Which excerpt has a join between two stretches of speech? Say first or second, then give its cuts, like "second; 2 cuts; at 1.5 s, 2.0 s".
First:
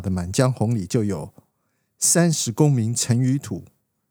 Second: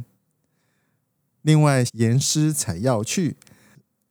second; 1 cut; at 1.9 s